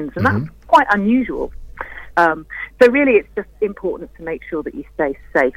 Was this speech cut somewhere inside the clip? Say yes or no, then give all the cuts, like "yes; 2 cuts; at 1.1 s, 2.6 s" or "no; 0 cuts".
yes; 1 cut; at 2.1 s